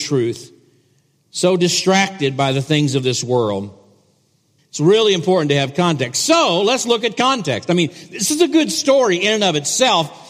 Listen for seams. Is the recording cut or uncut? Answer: cut